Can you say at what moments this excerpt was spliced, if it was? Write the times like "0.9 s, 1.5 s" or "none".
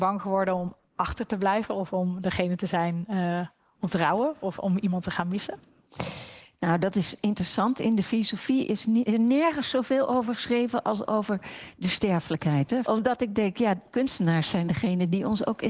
9.1 s, 12.8 s